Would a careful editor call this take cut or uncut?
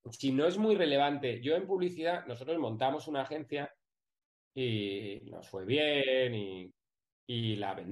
uncut